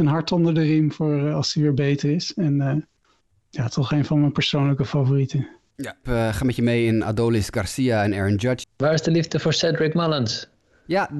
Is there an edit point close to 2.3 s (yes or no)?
no